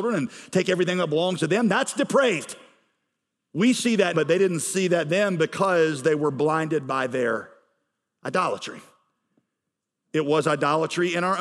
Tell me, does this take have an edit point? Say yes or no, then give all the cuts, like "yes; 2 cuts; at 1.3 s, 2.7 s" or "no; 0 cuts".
yes; 1 cut; at 4.1 s